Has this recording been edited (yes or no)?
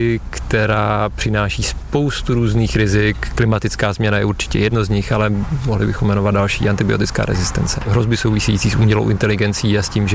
no